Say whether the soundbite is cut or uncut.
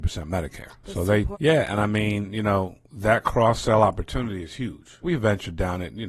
cut